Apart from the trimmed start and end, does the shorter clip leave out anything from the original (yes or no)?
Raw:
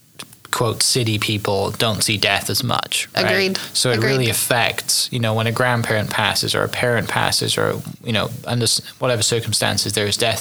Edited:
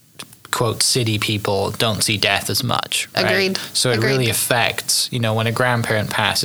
no